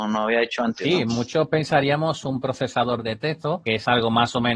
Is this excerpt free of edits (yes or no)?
yes